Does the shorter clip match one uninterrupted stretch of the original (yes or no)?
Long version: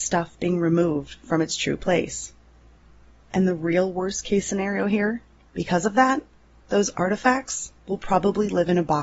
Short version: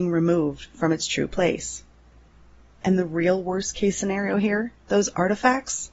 no